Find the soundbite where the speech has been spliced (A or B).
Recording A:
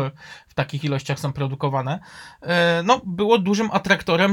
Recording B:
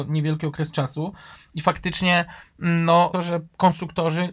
B